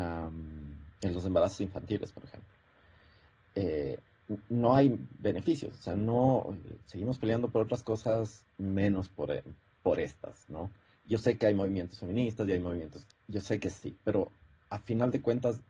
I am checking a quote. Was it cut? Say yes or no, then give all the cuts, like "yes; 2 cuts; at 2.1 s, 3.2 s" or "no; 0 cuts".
no; 0 cuts